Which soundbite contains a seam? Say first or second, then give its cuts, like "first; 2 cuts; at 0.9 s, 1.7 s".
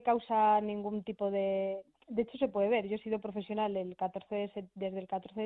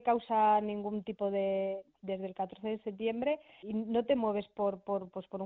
second; 2 cuts; at 2.0 s, 3.6 s